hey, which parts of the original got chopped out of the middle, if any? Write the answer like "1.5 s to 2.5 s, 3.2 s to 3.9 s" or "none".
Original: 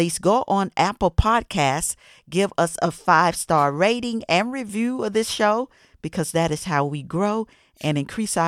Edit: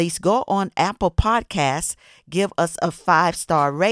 none